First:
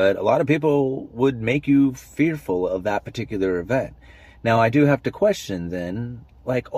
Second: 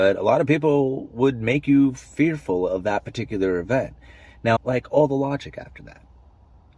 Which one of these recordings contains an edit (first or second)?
second